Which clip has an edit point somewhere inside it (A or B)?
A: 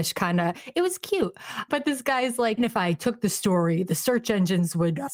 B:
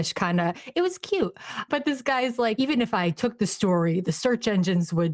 A